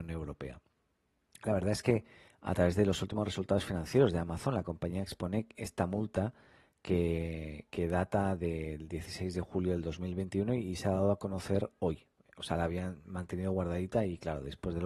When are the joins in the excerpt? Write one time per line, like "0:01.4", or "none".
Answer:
none